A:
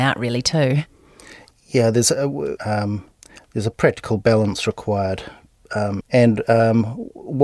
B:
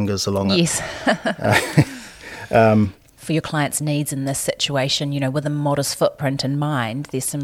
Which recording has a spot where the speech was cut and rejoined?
A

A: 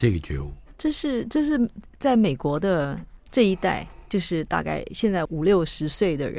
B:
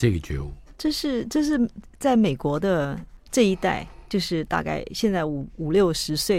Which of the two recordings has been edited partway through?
A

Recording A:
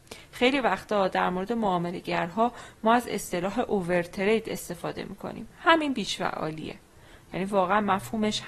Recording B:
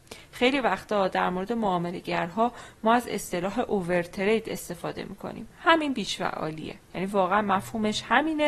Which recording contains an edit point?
B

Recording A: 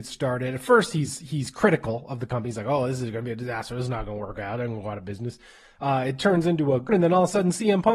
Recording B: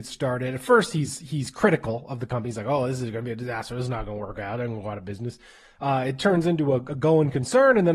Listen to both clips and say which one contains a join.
A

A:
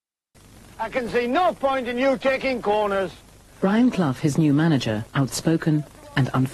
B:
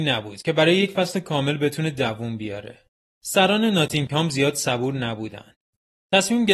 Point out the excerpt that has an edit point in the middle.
A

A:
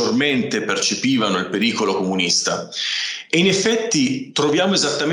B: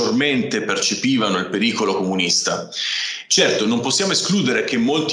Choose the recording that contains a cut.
B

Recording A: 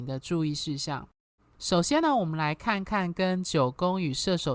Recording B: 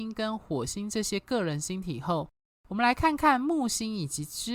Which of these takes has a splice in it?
A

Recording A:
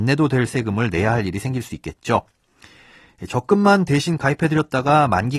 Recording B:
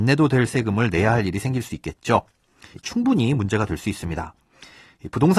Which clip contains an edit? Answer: B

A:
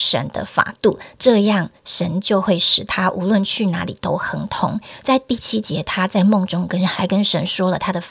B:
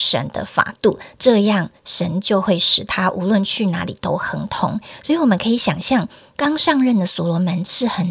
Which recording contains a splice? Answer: A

